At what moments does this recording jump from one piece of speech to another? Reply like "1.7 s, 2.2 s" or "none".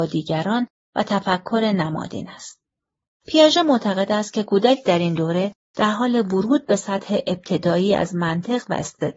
3.1 s